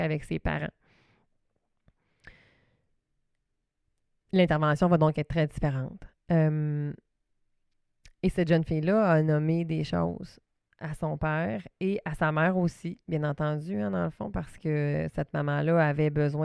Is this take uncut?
yes; 0 cuts

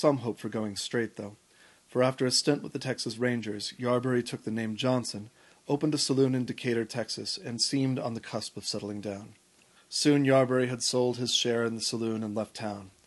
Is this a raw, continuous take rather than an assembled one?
no; 1 cut; at 9.8 s

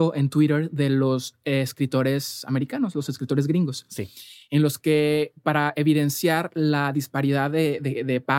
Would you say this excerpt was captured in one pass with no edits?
yes; 0 cuts

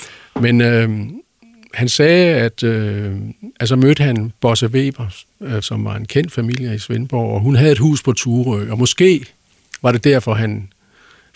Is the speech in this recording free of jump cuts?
no; 2 cuts; at 3.6 s, 5.6 s

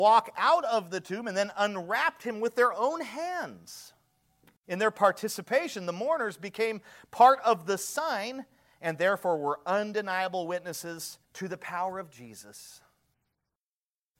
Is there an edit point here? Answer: yes; 2 cuts; at 4.6 s, 11.2 s

